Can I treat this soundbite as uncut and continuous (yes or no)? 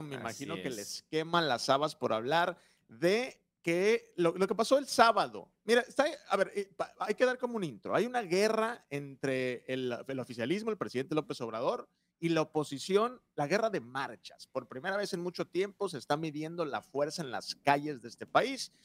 yes